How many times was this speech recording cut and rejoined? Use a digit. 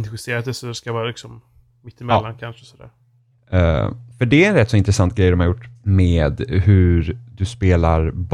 2